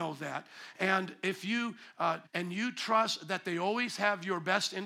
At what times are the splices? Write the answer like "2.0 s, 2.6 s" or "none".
2.2 s